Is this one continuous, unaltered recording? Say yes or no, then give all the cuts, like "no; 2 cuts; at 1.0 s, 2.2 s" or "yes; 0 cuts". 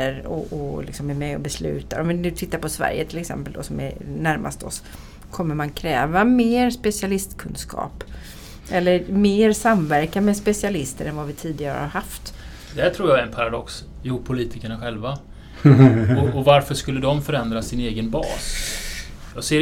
no; 1 cut; at 14.0 s